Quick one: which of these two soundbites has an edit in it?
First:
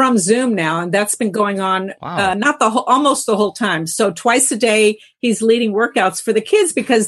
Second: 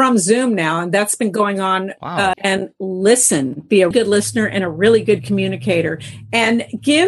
second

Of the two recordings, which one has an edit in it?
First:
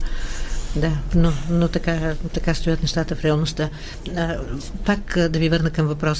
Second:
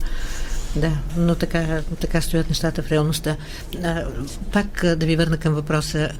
second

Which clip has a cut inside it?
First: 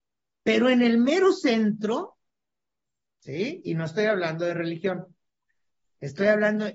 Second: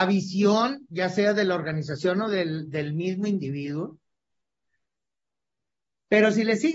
first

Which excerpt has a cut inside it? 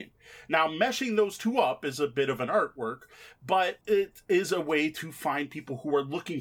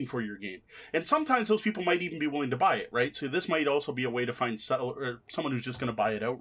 first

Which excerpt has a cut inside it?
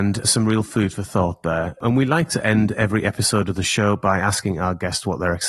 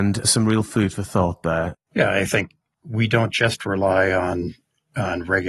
second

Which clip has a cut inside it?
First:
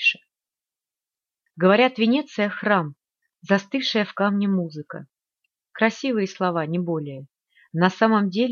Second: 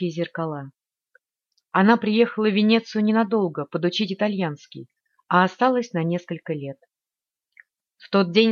first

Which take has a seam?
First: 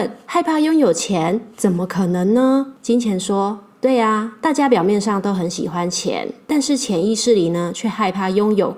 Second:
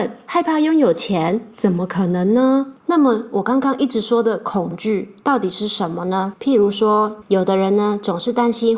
second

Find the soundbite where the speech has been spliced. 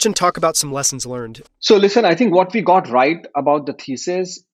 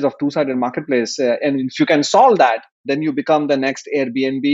first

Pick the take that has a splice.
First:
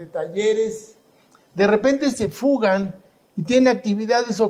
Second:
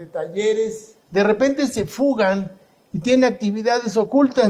second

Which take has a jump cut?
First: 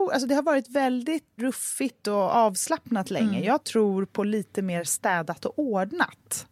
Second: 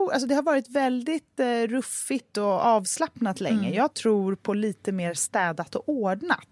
first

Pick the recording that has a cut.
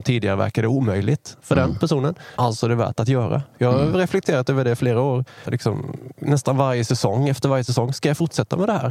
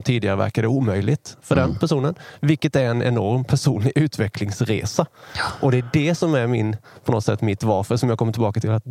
first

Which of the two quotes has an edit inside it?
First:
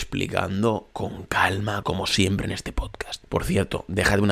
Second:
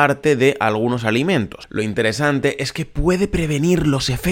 first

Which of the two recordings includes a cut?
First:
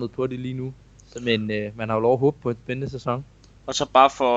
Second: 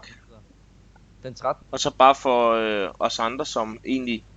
second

